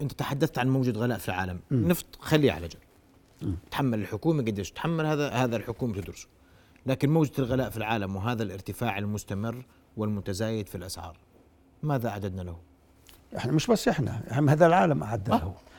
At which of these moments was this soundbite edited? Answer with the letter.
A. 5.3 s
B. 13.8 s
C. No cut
A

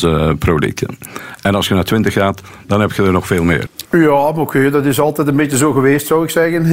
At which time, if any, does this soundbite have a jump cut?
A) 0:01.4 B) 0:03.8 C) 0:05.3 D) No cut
B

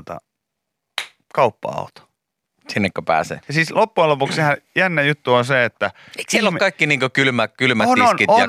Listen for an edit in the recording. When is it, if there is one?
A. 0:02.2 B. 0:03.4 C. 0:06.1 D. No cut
B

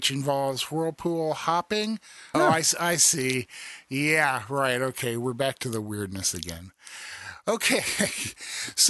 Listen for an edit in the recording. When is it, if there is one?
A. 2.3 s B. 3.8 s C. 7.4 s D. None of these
A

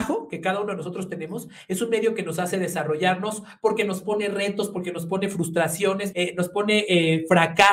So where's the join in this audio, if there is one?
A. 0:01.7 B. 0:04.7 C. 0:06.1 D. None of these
C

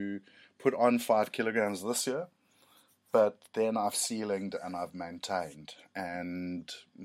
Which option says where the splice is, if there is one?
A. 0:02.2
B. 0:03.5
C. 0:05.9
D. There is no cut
D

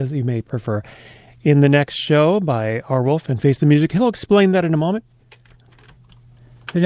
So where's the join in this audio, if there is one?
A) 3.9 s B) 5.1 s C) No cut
C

